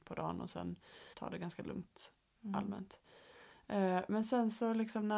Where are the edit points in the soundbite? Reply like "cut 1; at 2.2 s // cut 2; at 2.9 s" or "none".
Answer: cut 1; at 1.1 s